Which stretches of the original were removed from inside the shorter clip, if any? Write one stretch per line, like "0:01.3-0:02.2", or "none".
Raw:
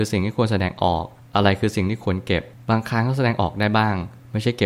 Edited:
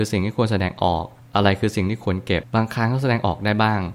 0:02.4-0:02.6